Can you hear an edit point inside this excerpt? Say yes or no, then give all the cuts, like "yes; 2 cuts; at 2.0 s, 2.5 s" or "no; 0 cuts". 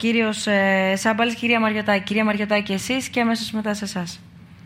no; 0 cuts